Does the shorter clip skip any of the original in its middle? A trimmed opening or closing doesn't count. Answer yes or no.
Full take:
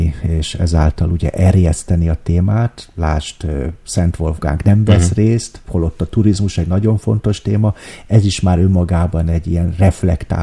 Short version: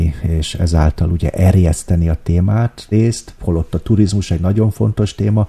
yes